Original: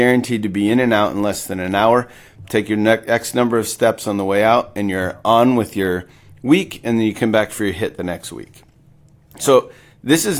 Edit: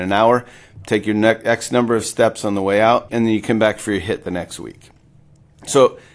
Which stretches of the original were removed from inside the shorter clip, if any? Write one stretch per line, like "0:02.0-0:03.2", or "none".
0:04.7-0:06.8